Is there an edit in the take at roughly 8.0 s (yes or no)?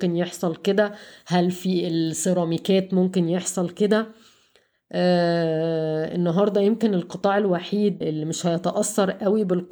yes